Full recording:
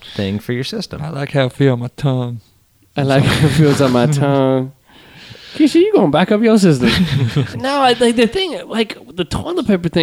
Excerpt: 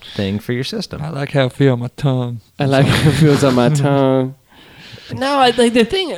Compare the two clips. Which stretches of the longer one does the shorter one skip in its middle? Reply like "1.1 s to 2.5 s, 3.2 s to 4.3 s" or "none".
2.5 s to 2.9 s, 5.5 s to 7.5 s